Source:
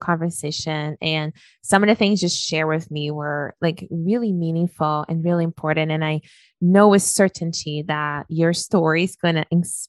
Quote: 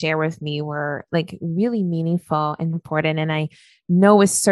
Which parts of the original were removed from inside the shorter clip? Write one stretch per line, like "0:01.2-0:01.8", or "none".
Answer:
0:05.2-0:05.4